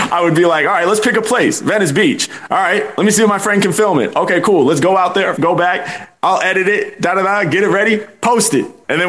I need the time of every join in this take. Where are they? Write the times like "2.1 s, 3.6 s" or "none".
5.4 s